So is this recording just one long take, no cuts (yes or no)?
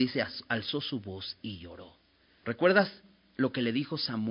no